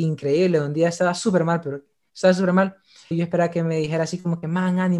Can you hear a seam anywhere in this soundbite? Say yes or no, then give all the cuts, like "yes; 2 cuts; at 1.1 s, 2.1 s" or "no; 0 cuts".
yes; 1 cut; at 3.1 s